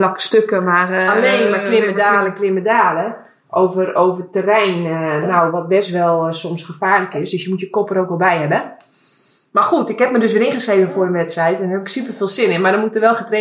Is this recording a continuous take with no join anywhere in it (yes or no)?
yes